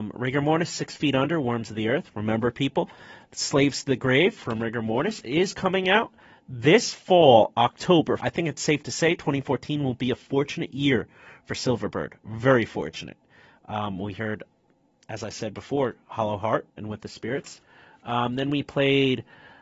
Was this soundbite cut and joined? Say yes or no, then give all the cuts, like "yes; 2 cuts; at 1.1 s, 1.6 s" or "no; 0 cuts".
yes; 1 cut; at 8.2 s